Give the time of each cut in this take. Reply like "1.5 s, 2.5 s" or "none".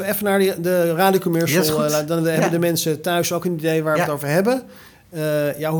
none

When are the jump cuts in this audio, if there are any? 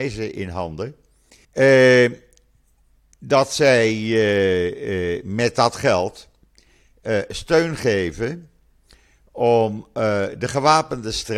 1.4 s

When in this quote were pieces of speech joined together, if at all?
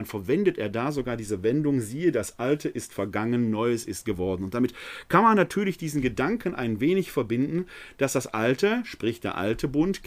none

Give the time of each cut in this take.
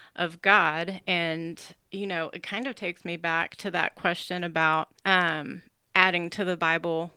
5.0 s

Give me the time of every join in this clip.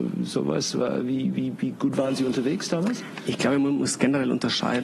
none

